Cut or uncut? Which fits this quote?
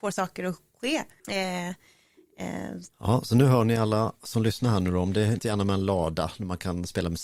cut